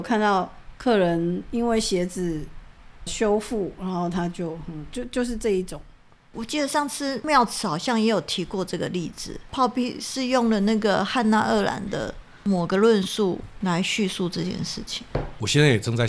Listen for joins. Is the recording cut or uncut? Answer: cut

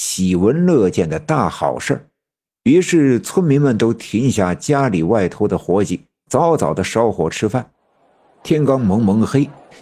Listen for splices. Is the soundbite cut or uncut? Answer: uncut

